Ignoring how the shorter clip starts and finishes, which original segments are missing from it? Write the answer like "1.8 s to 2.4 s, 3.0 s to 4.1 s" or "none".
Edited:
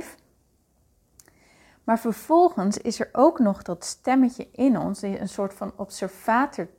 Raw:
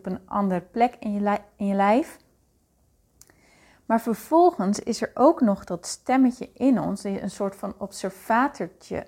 none